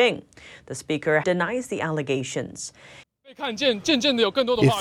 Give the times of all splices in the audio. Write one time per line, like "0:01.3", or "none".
0:01.2
0:03.0